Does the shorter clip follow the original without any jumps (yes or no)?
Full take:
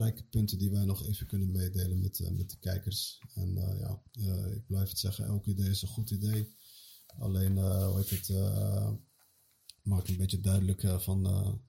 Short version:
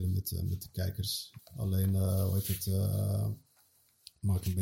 no